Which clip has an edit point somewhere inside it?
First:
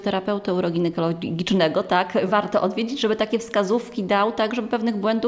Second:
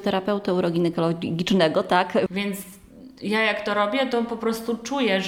second; 1 cut; at 2.3 s

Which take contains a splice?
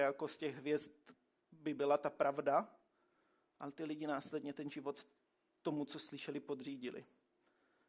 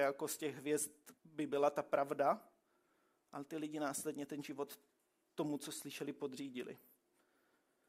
second; 1 cut; at 1.2 s

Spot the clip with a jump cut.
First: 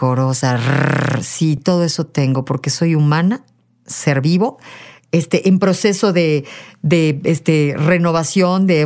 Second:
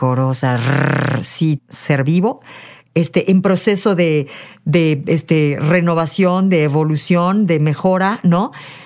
second; 1 cut; at 1.6 s

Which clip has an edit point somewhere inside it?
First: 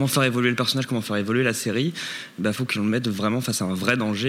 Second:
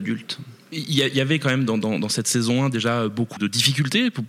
second; 1 cut; at 3.4 s

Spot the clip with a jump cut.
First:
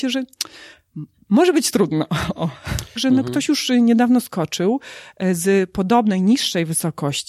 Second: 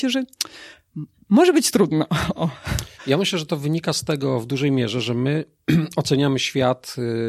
first; 1 cut; at 3.0 s

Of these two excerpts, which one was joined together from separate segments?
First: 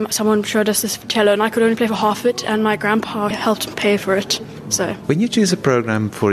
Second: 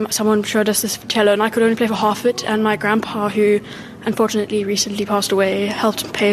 first; 1 cut; at 3.3 s

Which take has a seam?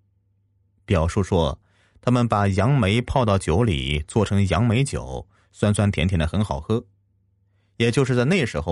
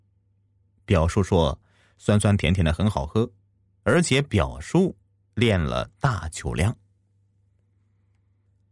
second; 2 cuts; at 1.9 s, 3.8 s

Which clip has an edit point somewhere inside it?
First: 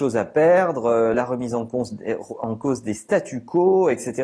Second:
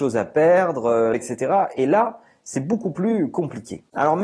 second; 1 cut; at 1.1 s

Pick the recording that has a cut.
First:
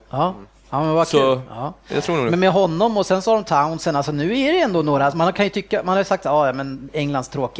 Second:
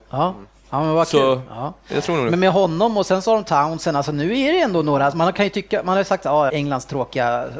second; 1 cut; at 6.5 s

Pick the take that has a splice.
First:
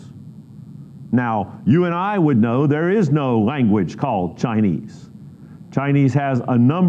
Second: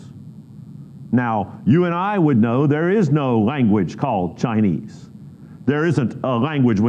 second; 1 cut; at 5.6 s

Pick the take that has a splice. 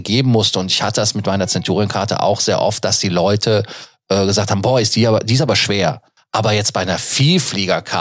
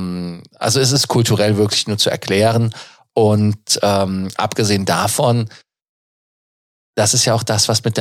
first; 1 cut; at 6.2 s

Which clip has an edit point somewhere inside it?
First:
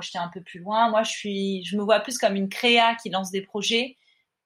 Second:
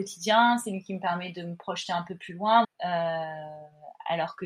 second; 1 cut; at 2.6 s

